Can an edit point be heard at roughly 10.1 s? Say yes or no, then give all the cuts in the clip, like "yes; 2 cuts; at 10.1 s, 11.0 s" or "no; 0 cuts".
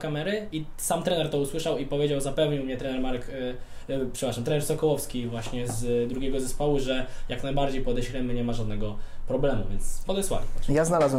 yes; 1 cut; at 10.1 s